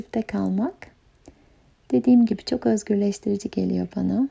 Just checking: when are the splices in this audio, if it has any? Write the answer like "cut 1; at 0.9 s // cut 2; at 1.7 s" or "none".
none